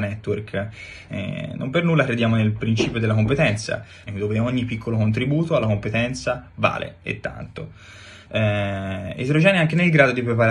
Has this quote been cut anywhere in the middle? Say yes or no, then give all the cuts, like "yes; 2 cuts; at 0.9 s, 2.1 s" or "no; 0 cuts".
yes; 3 cuts; at 1.1 s, 4.1 s, 8.3 s